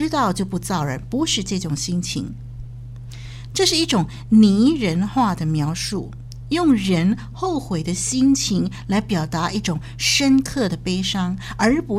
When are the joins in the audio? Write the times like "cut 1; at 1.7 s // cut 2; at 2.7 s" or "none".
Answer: cut 1; at 3.5 s